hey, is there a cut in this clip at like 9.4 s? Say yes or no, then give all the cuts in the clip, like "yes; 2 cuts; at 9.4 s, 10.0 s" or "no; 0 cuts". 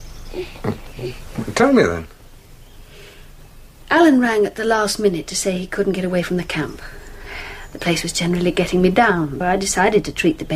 yes; 1 cut; at 9.4 s